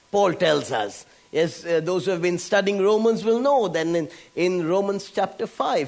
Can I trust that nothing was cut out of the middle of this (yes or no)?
yes